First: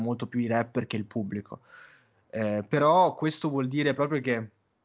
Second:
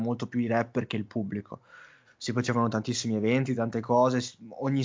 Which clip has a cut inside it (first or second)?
second